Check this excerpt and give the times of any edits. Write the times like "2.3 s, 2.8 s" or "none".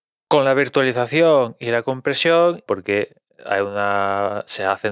2.7 s